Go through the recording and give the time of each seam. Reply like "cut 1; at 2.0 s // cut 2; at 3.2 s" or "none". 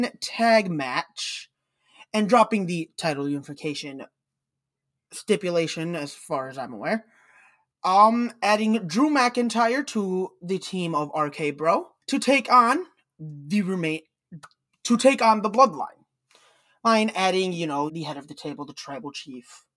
cut 1; at 12.0 s // cut 2; at 17.9 s